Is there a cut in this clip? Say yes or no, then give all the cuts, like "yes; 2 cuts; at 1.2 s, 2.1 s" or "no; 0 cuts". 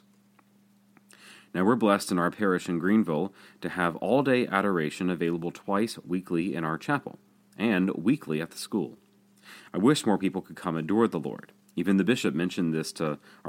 yes; 1 cut; at 11.7 s